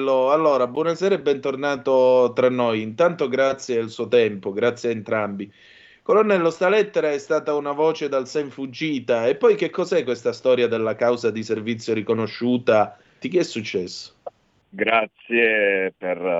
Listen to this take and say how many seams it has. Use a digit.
2